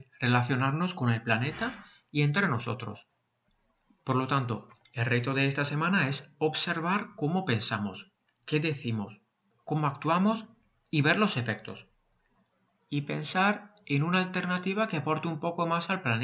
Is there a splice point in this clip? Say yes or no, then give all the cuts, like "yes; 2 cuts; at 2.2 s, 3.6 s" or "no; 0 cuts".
no; 0 cuts